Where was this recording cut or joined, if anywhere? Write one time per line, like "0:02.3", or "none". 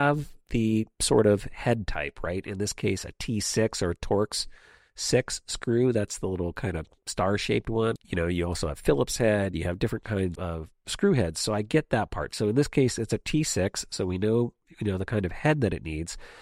0:08.0
0:10.4